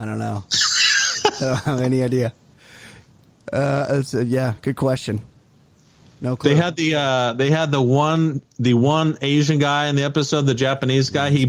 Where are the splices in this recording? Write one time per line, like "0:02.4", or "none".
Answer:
none